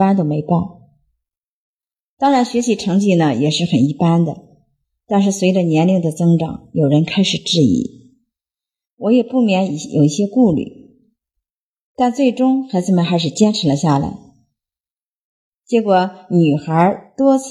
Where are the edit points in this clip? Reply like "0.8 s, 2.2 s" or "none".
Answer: none